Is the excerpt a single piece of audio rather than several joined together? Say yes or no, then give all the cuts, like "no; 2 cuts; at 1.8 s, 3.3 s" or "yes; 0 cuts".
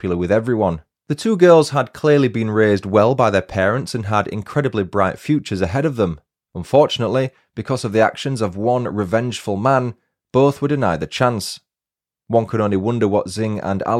no; 1 cut; at 1.0 s